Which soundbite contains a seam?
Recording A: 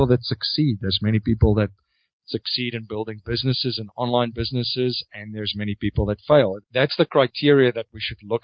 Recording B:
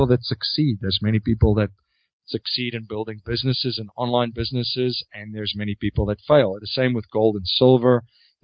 A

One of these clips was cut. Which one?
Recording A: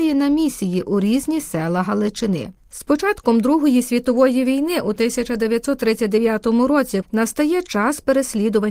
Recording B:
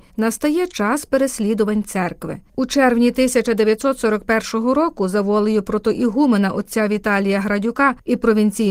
A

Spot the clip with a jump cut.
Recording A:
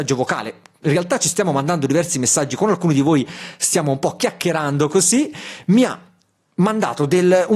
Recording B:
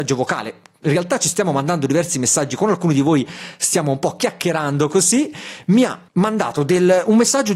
B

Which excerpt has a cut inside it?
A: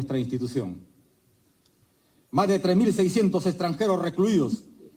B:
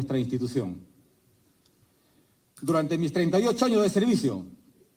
A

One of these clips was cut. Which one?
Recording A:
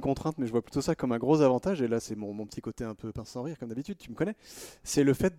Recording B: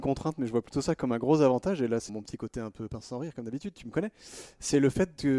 B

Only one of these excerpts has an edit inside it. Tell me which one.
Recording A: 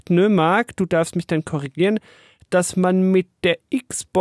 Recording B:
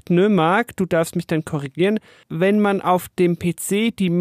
B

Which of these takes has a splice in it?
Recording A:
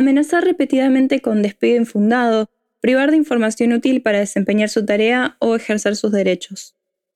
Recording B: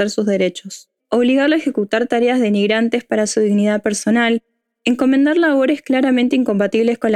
B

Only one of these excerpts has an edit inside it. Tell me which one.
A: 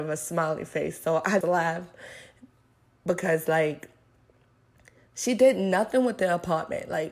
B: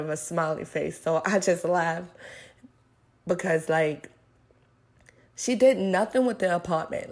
A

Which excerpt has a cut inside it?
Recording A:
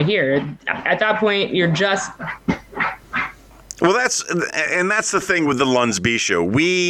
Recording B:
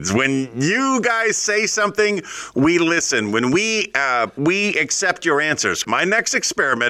B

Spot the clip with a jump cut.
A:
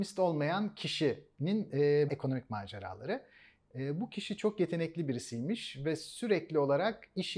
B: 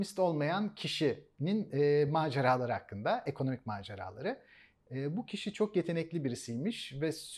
A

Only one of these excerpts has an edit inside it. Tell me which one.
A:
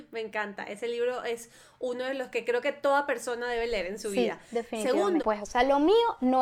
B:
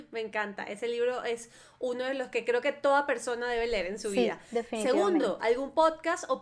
A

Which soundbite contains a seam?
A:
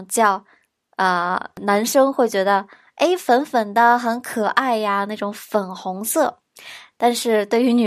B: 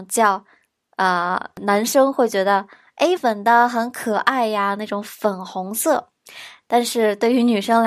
B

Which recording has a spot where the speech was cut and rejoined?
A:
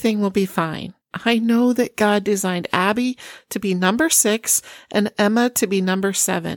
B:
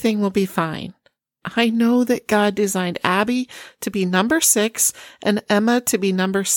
A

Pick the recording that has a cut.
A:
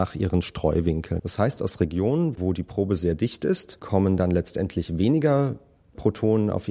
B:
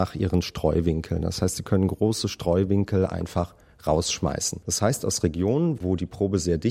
A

